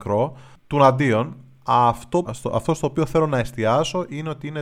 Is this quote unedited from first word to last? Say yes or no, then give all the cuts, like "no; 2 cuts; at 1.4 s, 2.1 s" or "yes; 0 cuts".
no; 1 cut; at 2.2 s